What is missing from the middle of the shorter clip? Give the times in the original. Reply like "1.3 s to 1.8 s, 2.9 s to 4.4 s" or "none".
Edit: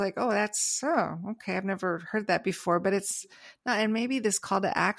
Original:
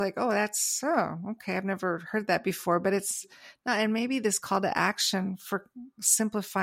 none